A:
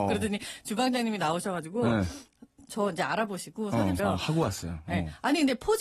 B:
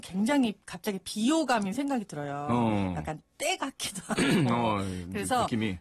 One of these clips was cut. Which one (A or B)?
A